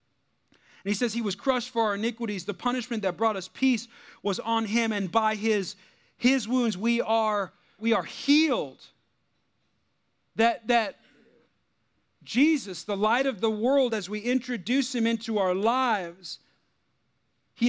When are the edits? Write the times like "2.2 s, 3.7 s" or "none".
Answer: 7.8 s

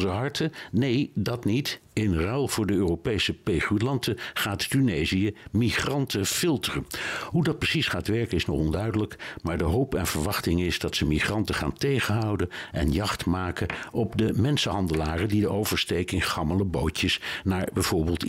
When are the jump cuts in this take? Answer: none

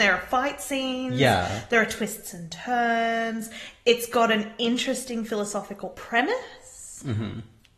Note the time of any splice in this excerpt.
none

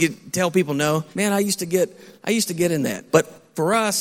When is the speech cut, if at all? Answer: 1.1 s, 3.1 s

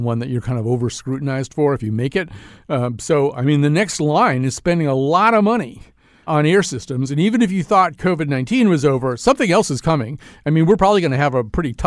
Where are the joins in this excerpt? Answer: 6.3 s

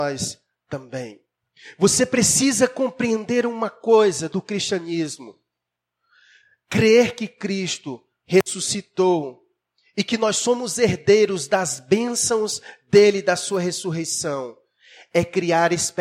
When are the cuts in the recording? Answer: none

